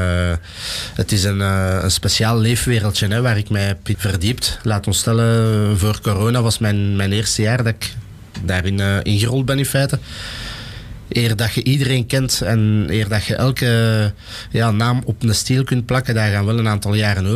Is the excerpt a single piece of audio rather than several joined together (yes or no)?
no